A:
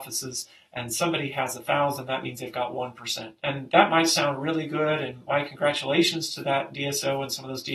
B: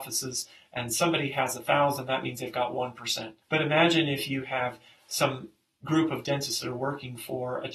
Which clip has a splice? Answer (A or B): B